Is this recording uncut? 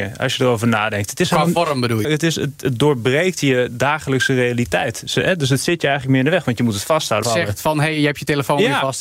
no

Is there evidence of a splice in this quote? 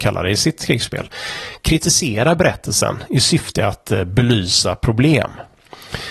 no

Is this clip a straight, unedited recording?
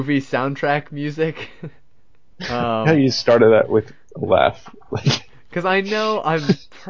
no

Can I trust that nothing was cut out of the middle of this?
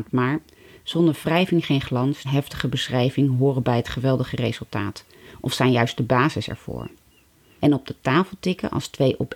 no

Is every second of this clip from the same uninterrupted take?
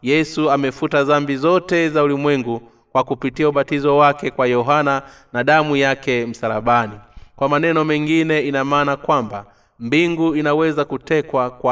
yes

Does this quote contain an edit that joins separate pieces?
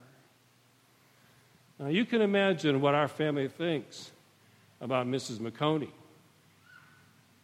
no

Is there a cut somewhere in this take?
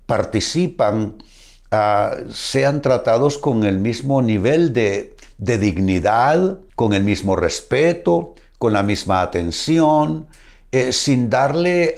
yes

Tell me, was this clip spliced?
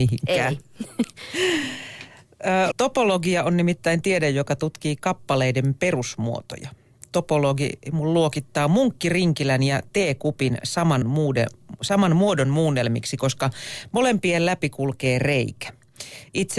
yes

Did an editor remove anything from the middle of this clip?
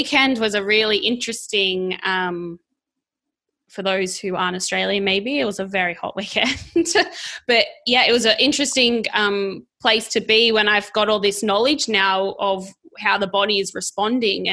no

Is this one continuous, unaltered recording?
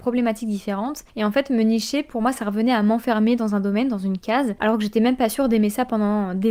yes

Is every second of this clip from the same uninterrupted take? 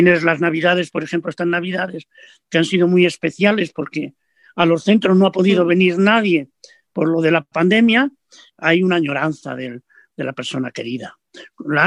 yes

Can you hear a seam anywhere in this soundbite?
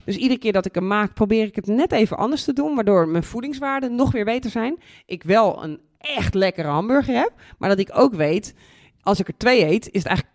no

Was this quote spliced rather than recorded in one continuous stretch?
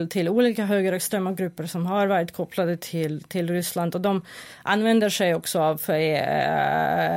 no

